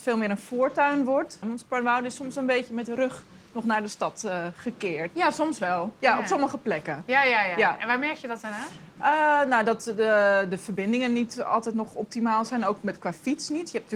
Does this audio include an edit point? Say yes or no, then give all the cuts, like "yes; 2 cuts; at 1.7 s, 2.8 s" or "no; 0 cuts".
yes; 2 cuts; at 1.4 s, 5.1 s